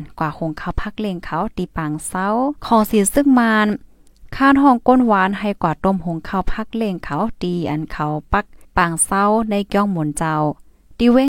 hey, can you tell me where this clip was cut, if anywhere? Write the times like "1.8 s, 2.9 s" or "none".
2.6 s, 8.6 s